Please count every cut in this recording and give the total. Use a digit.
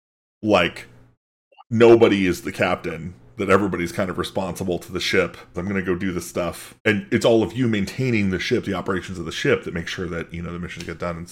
2